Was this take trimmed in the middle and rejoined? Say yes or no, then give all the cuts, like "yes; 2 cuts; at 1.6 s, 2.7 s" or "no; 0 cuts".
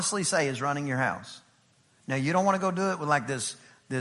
no; 0 cuts